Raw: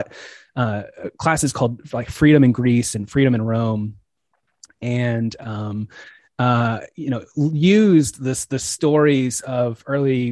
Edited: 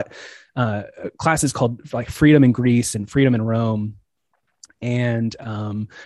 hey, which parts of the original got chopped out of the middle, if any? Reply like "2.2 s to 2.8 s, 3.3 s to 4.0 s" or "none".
none